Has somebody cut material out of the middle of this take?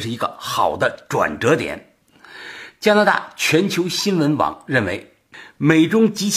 no; 0 cuts

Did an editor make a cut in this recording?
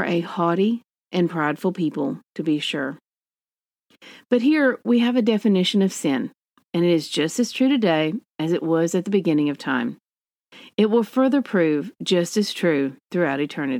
no; 0 cuts

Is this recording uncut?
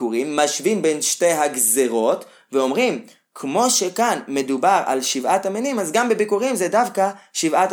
yes; 0 cuts

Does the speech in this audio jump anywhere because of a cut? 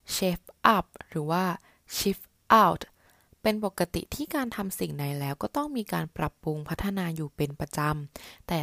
no; 0 cuts

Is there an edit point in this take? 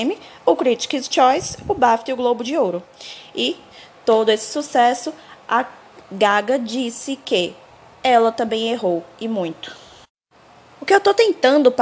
no; 0 cuts

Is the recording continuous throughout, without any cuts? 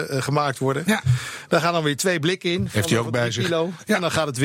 yes; 0 cuts

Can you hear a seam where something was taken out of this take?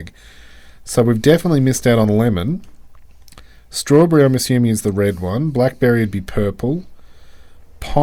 no; 0 cuts

